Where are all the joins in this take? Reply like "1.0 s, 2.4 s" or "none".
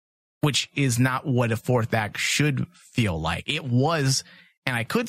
none

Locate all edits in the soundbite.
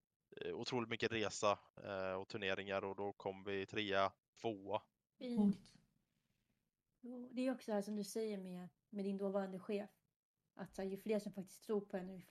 3.7 s, 5.1 s

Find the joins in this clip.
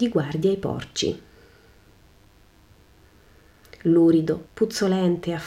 4.5 s

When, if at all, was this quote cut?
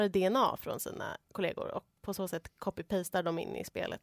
2.0 s

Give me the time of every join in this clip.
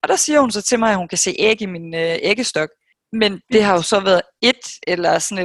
none

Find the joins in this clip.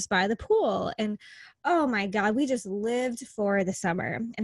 none

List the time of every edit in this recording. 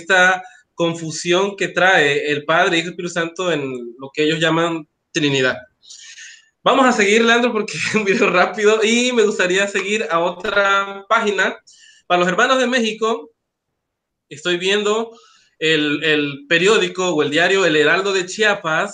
none

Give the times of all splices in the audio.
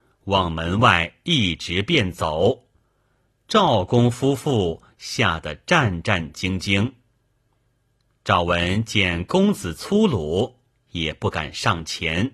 none

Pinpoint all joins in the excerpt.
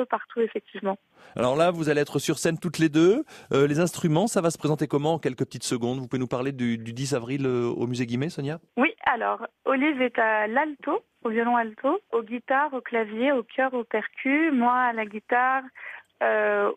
8.7 s, 12.1 s

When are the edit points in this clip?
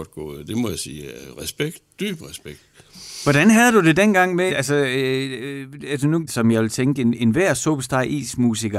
4.5 s, 6.3 s

